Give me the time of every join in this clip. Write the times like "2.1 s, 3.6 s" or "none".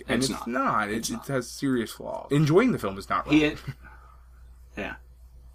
2.3 s